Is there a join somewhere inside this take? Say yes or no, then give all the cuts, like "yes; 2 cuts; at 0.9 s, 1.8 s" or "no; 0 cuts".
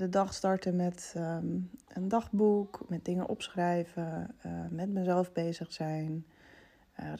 no; 0 cuts